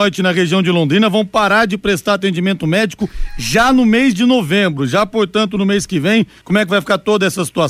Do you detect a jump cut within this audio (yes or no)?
yes